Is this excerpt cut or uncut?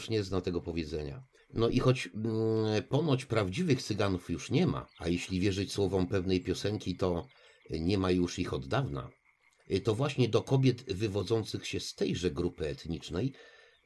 cut